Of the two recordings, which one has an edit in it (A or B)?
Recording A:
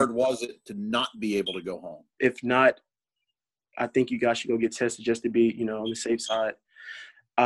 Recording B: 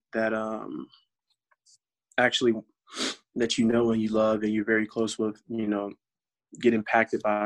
A